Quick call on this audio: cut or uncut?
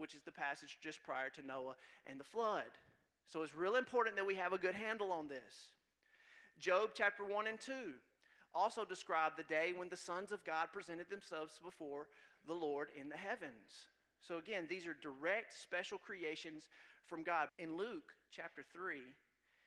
cut